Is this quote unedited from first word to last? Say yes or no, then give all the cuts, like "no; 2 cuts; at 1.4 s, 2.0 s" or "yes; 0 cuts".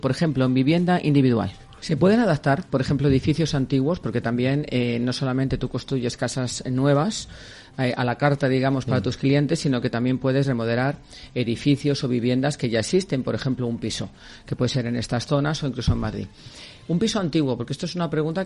no; 1 cut; at 1.8 s